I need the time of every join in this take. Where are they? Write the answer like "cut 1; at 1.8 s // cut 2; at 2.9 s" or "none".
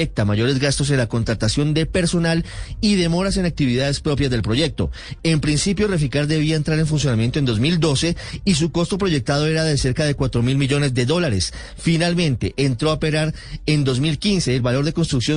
cut 1; at 5.2 s